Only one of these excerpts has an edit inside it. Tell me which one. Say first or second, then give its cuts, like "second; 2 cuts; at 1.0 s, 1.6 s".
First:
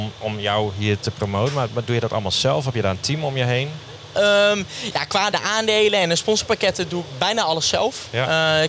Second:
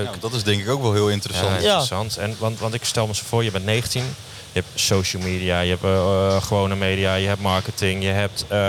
first; 1 cut; at 5.3 s